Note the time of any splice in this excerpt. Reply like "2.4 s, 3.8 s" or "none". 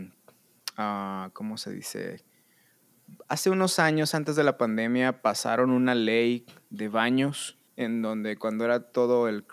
7.7 s